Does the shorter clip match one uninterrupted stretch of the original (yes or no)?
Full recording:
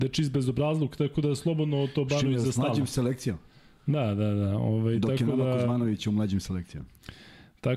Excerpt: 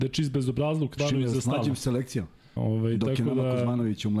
no